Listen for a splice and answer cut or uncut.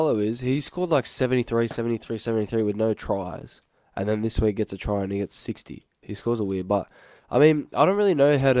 cut